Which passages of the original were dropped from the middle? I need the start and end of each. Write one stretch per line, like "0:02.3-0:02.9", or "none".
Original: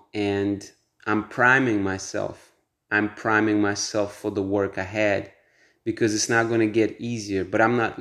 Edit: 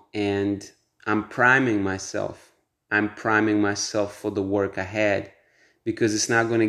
none